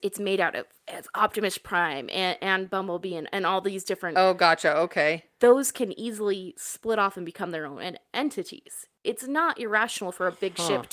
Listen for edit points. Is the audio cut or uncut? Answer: uncut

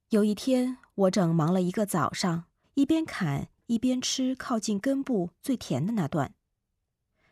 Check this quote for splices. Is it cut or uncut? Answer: cut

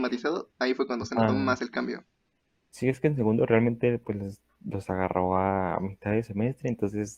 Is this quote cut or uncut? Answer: uncut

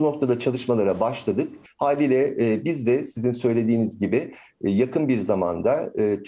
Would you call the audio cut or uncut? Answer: cut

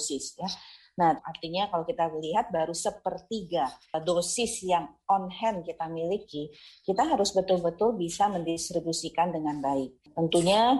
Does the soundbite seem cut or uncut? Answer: cut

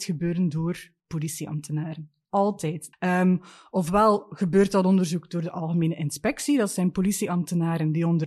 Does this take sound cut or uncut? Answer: cut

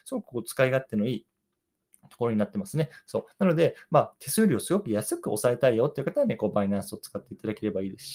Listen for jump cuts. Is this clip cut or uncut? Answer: uncut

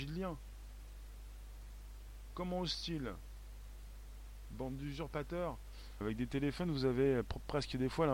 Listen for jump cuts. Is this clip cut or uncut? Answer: cut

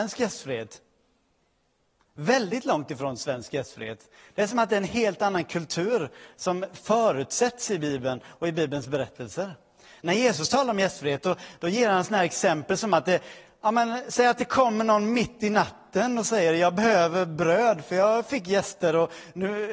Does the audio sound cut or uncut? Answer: uncut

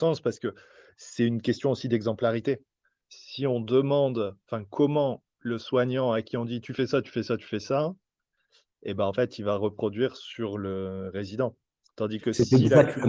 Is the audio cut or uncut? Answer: uncut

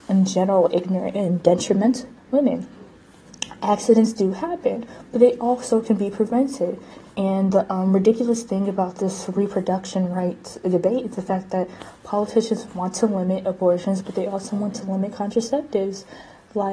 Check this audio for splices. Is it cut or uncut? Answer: cut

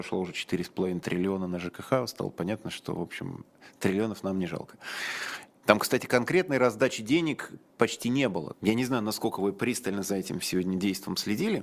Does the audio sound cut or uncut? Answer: cut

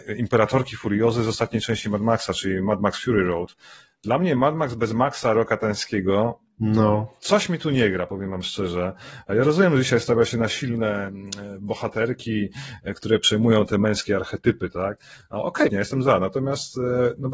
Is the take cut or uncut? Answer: cut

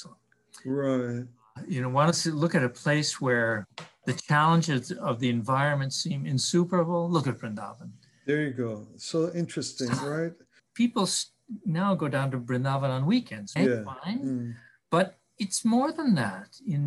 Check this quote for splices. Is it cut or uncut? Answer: cut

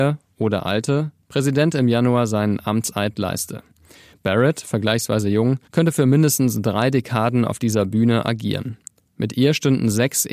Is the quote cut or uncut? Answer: cut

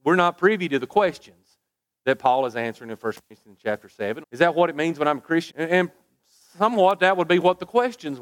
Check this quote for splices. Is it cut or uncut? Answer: cut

